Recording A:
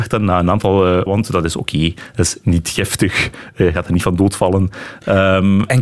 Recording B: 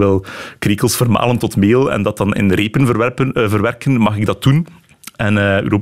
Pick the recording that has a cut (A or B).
A